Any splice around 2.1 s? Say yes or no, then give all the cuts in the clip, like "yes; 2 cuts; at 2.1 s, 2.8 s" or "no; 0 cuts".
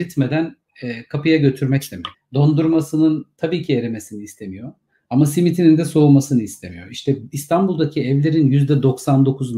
yes; 1 cut; at 2.1 s